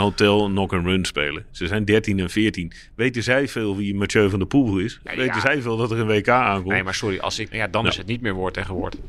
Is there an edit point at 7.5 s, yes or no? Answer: yes